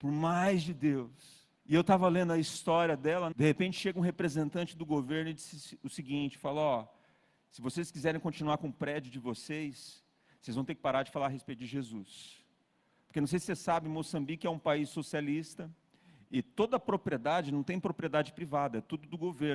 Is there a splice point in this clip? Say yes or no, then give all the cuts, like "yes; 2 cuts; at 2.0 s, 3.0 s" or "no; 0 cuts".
yes; 2 cuts; at 1.6 s, 3.3 s